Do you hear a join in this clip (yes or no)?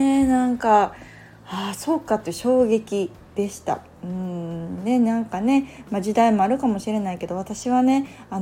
no